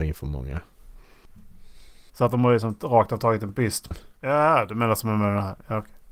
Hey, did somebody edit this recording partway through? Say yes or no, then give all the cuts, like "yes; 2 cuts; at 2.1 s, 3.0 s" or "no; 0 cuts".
yes; 2 cuts; at 2.1 s, 3.9 s